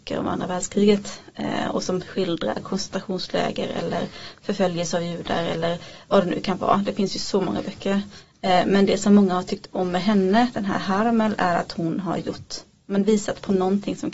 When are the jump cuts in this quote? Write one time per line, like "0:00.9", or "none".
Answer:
none